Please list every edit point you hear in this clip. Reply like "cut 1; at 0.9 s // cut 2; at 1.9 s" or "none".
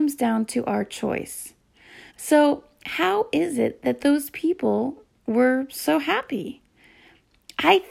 cut 1; at 2.1 s

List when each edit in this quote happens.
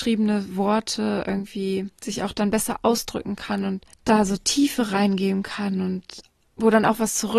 cut 1; at 1.9 s // cut 2; at 3.9 s

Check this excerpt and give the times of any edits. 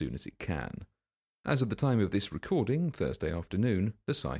none

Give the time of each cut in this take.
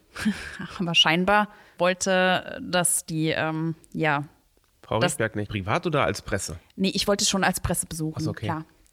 cut 1; at 5.5 s

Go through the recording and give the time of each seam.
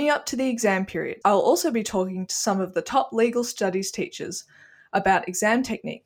cut 1; at 1.2 s

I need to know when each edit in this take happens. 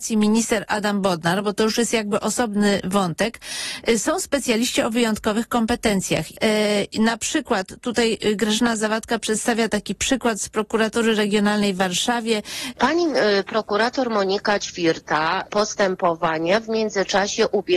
cut 1; at 6.3 s // cut 2; at 12.7 s // cut 3; at 15.4 s

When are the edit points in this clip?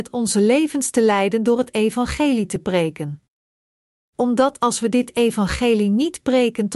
cut 1; at 4.0 s

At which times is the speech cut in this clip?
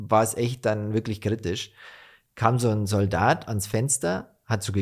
none

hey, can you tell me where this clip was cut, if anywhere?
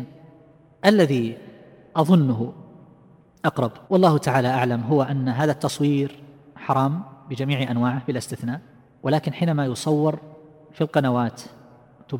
cut 1; at 3.8 s

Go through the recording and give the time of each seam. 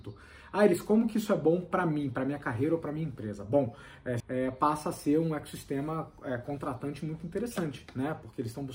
cut 1; at 4.2 s

